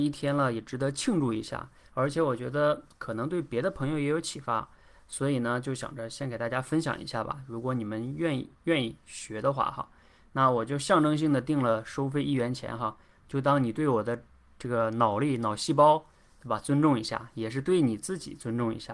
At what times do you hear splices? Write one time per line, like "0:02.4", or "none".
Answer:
none

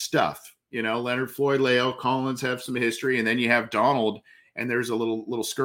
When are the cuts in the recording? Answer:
none

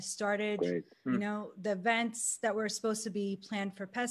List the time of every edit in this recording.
0:01.0

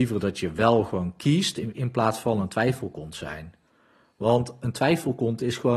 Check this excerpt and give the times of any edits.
0:01.7

